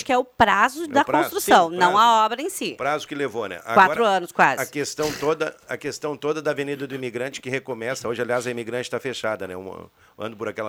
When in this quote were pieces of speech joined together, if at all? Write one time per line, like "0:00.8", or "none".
none